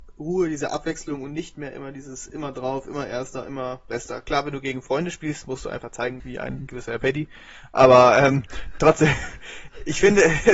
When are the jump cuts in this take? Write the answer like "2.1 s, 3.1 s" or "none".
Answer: 6.2 s